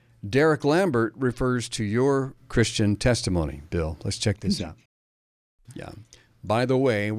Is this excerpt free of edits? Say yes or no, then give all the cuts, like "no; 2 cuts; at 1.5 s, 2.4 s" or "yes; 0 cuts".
no; 1 cut; at 5.7 s